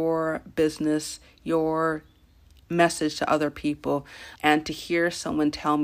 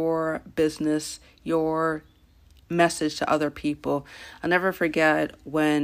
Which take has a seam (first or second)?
first